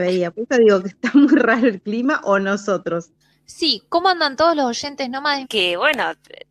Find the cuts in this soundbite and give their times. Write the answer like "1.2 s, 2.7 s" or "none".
5.4 s

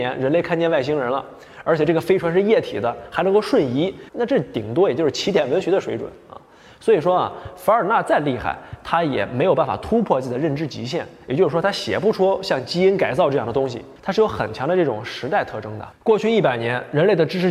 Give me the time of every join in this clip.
4.1 s

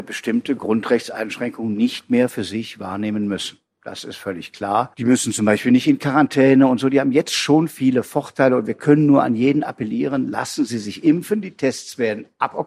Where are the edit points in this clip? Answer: none

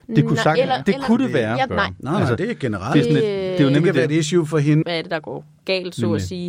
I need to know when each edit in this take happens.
1.7 s, 4.8 s

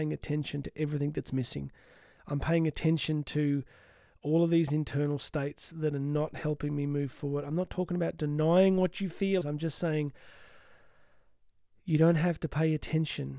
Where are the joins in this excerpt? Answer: 9.4 s

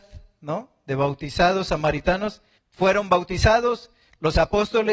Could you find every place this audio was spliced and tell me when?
2.6 s

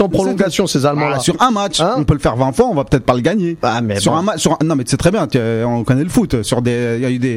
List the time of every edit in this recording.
none

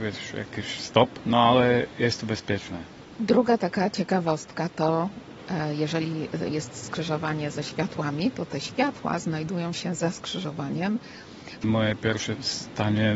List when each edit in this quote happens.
4.7 s, 11.6 s

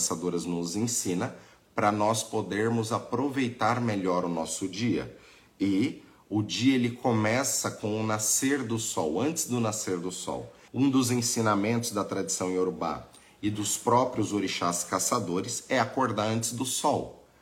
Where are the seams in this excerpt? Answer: 10.7 s

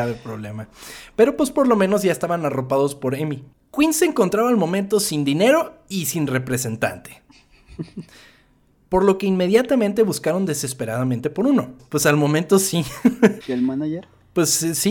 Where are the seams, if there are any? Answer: 11.8 s, 13.4 s

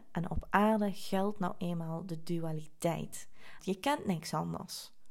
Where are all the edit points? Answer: 3.6 s

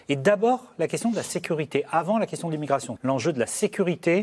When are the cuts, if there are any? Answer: 3.0 s

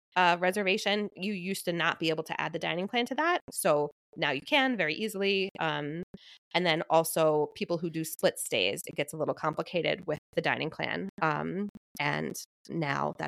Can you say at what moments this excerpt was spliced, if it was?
3.4 s

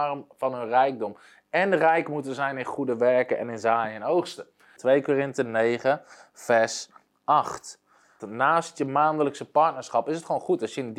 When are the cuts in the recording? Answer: 4.8 s, 8.2 s

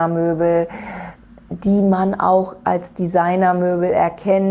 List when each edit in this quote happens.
none

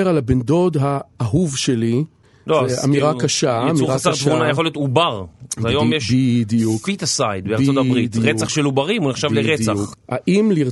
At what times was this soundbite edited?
none

